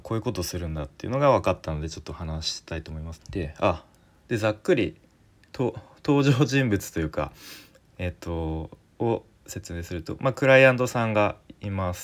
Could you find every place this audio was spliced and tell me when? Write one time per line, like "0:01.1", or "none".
0:03.2